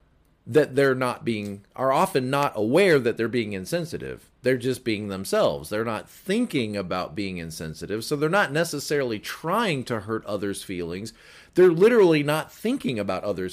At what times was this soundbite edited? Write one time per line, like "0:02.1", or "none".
0:01.7